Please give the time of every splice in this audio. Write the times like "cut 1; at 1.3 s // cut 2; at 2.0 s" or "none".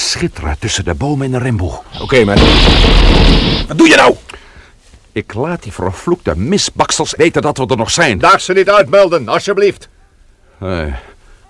cut 1; at 7.2 s